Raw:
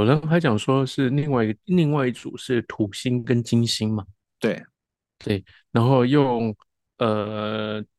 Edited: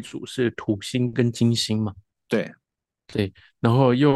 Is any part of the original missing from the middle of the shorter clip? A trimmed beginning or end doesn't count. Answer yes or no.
no